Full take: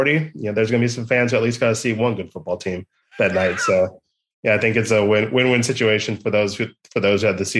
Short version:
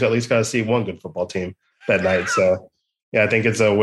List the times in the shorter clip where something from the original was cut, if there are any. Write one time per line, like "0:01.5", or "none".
none